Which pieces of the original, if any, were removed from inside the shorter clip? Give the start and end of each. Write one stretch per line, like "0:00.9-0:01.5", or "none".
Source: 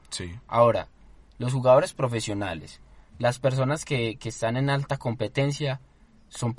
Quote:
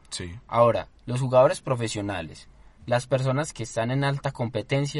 0:01.0-0:01.3
0:03.8-0:04.2

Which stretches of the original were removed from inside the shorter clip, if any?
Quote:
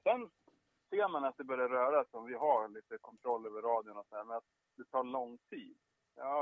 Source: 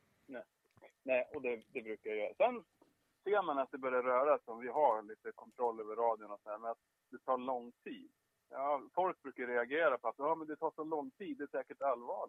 none

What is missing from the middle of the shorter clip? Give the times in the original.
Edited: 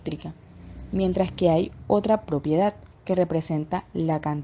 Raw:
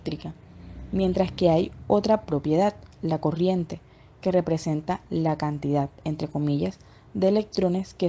0:02.9-0:04.1

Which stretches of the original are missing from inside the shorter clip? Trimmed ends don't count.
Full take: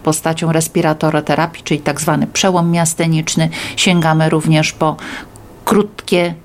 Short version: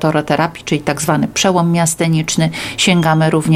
none

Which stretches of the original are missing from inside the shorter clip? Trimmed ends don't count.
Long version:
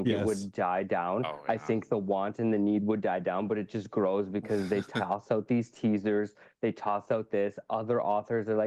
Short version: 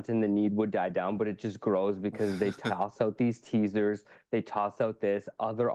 none

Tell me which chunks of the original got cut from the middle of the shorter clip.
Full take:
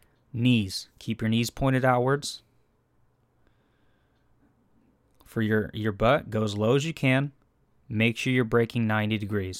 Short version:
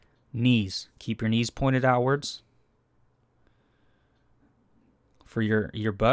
none

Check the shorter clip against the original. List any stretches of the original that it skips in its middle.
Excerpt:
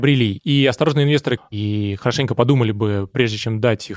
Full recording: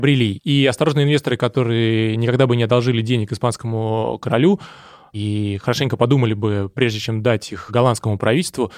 0:01.4-0:05.0

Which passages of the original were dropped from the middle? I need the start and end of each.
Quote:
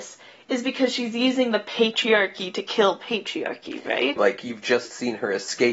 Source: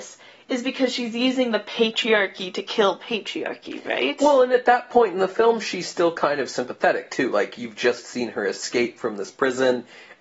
0:04.2-0:07.3

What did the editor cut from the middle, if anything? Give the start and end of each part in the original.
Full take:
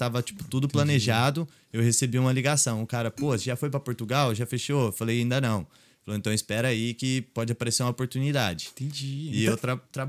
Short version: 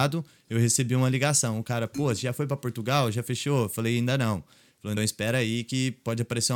0:06.2-0:06.3

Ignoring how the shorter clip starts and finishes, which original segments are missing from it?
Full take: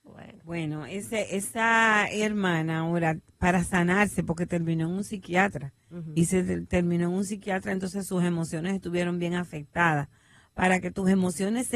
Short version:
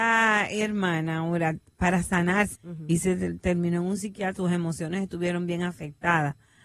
0:04.2-0:05.8
0:07.6-0:08.1

